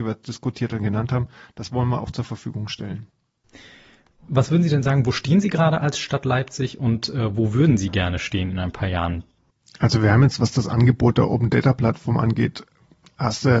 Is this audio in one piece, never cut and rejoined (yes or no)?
yes